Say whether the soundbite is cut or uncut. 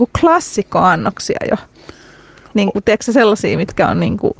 uncut